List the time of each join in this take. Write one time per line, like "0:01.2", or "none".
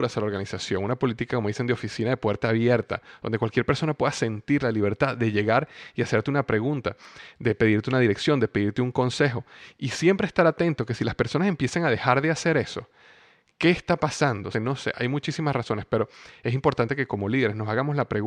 0:14.5